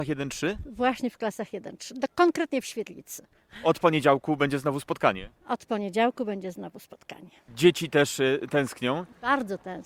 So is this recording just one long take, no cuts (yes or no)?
yes